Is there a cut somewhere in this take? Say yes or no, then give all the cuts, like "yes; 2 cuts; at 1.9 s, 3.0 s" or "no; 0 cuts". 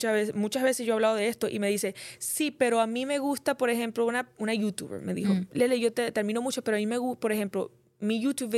no; 0 cuts